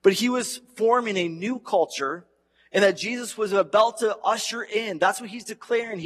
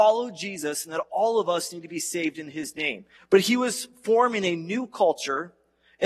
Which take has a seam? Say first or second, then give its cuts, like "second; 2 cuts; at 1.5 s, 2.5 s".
second; 1 cut; at 3.2 s